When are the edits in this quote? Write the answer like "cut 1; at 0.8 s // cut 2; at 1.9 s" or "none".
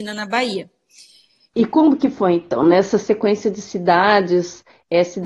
cut 1; at 1.5 s